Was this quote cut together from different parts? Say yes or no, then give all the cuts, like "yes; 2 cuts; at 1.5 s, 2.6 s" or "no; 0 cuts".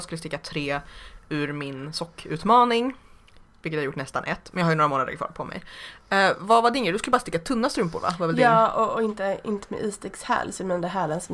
no; 0 cuts